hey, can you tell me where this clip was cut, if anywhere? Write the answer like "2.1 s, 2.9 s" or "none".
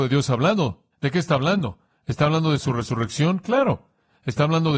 0.9 s